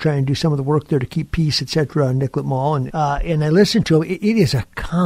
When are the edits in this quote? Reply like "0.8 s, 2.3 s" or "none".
2.9 s